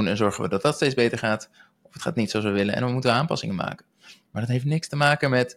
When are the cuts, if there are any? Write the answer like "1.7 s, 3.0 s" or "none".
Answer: none